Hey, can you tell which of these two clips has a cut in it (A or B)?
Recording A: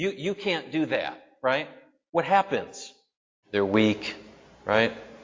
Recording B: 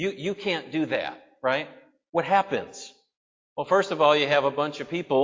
A